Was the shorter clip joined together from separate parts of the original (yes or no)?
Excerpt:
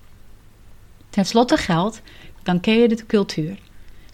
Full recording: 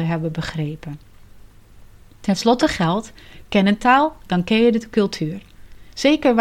yes